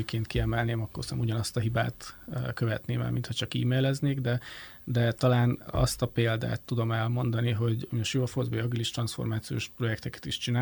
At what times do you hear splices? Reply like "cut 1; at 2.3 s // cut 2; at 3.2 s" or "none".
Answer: none